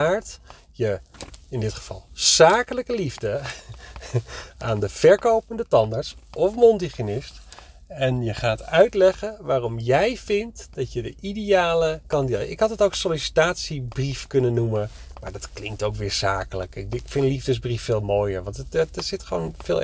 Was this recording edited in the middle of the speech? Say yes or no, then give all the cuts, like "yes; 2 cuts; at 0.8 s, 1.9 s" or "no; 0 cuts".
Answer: no; 0 cuts